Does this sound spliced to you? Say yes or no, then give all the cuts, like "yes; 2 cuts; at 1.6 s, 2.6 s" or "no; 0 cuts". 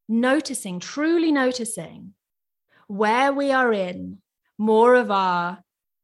no; 0 cuts